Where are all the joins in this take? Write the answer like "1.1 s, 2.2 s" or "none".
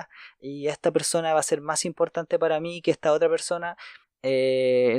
4.0 s